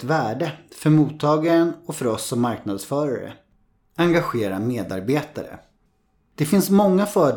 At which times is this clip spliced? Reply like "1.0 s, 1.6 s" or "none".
none

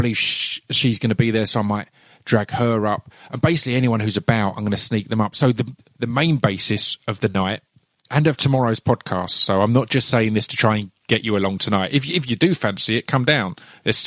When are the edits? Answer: none

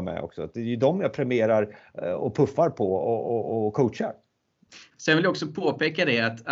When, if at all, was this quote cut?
4.9 s

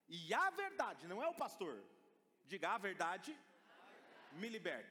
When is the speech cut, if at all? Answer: none

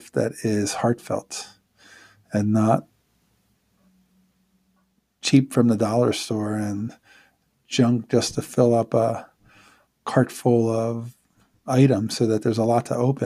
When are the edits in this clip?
none

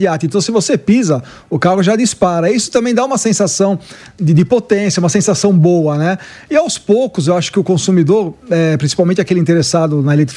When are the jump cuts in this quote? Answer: none

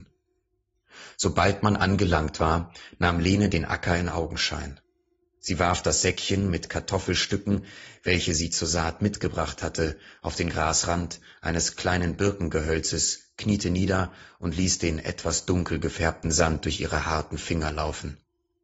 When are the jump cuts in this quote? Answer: none

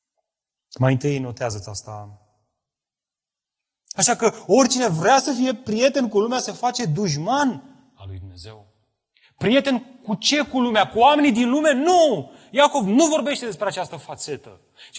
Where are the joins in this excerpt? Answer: 3.9 s

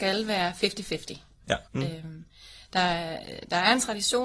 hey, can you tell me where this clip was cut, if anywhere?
1.7 s

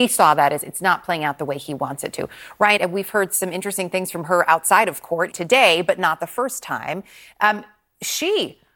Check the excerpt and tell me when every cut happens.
2.8 s, 5.3 s

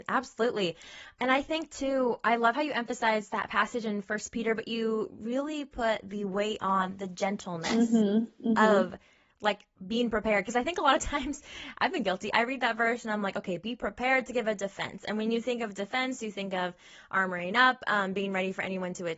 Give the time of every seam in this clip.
none

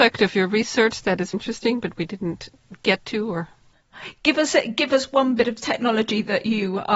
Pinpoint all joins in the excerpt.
1.3 s

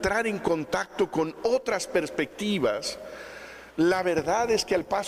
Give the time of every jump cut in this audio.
3.7 s

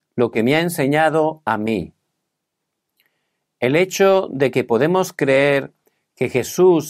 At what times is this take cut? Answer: none

